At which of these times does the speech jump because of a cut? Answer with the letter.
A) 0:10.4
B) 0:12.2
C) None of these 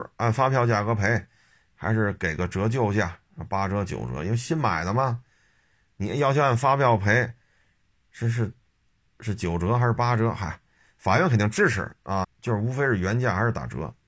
B